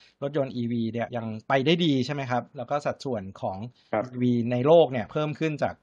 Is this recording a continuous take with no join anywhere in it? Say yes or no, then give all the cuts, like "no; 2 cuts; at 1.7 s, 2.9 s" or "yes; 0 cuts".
no; 1 cut; at 1.1 s